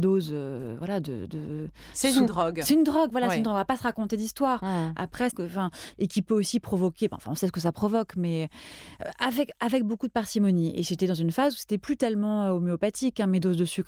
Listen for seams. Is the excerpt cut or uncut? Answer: cut